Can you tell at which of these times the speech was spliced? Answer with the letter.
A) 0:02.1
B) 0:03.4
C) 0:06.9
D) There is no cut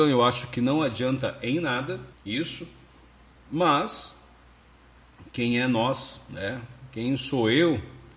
A